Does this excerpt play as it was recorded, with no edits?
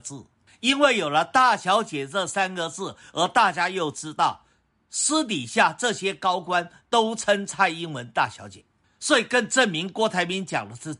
yes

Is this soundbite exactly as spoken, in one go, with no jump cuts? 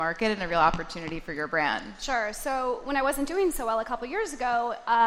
yes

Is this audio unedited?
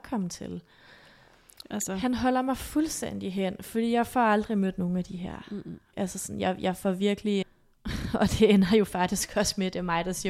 no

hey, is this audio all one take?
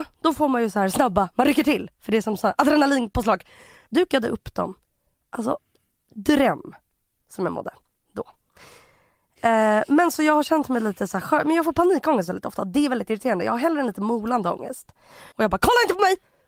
no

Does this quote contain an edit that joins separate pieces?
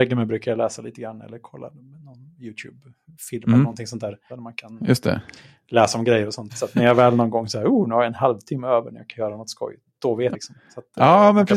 yes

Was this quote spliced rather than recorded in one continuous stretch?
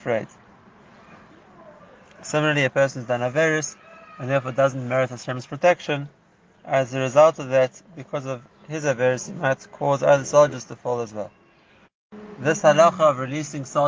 no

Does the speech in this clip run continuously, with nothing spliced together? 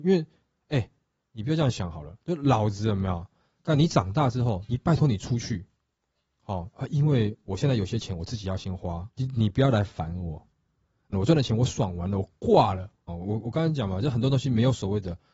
no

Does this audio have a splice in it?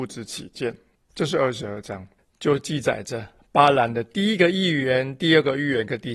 yes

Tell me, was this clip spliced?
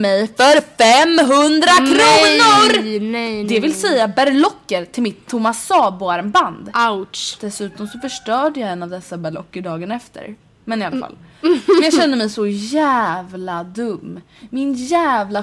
no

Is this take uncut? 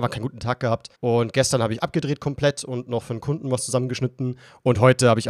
no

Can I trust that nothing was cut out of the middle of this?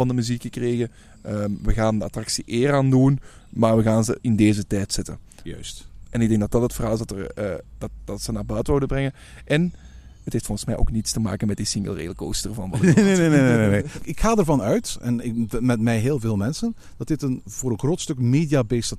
yes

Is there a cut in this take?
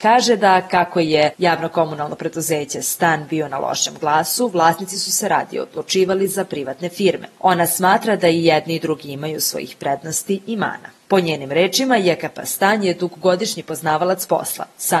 no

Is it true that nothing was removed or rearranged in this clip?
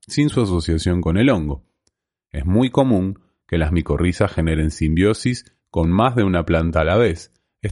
yes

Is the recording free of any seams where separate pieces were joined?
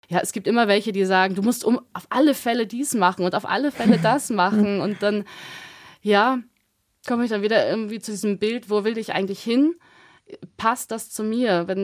yes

